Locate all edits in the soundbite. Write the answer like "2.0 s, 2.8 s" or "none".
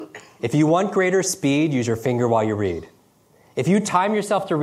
none